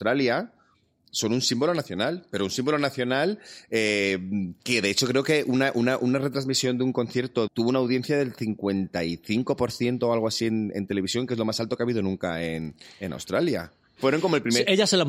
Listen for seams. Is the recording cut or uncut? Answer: cut